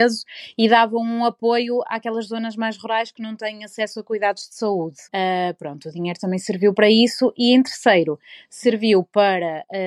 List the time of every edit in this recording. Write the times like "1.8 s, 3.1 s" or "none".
5.1 s